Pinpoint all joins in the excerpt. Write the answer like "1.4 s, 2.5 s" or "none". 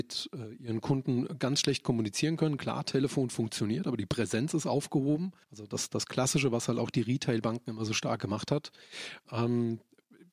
5.4 s, 9.2 s